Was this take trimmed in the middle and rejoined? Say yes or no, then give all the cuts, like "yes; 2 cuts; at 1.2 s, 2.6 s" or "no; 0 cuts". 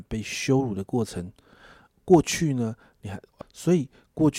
yes; 1 cut; at 3.4 s